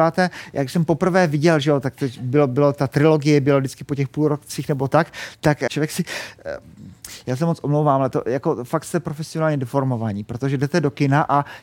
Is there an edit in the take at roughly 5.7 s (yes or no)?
yes